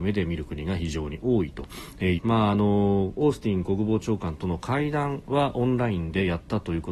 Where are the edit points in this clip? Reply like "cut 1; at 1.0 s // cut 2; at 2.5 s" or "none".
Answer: cut 1; at 2.2 s